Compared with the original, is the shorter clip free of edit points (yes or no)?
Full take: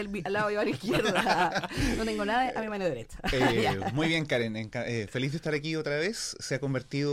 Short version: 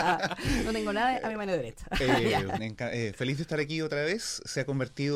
no